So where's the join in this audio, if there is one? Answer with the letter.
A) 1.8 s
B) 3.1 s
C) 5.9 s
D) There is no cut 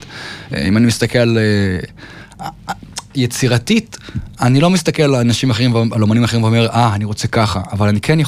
D